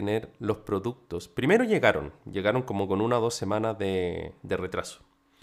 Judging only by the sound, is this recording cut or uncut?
uncut